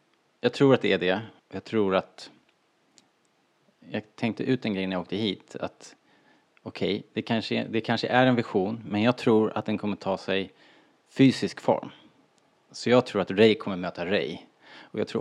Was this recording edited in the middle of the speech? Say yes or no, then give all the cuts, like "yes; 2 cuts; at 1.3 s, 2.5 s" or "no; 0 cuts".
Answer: yes; 1 cut; at 1.4 s